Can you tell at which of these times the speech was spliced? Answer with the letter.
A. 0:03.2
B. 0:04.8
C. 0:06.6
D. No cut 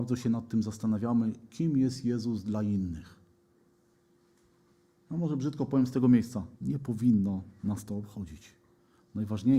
C